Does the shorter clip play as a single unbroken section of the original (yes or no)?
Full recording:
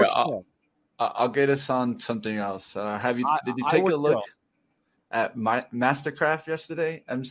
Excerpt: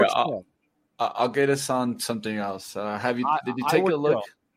yes